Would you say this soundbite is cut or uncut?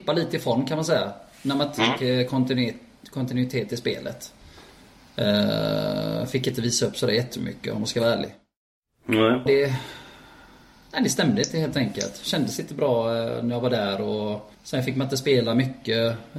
cut